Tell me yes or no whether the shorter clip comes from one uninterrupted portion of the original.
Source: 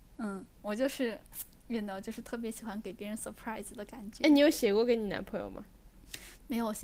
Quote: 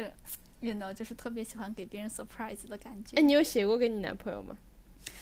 yes